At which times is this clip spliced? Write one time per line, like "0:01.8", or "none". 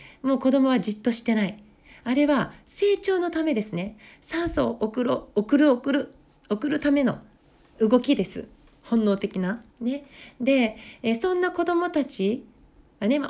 0:09.7